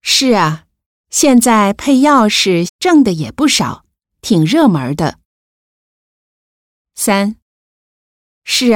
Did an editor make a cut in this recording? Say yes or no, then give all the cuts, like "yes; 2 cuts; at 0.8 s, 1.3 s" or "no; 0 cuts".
yes; 1 cut; at 2.7 s